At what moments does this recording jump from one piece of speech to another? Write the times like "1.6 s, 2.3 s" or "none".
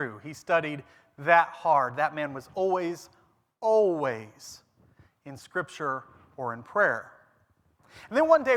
none